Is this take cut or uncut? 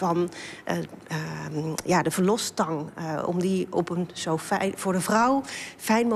uncut